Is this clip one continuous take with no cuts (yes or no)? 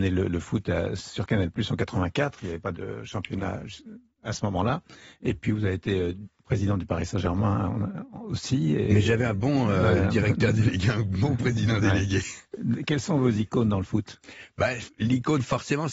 yes